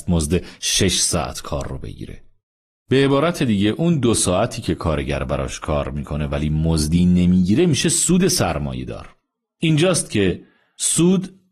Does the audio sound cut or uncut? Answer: uncut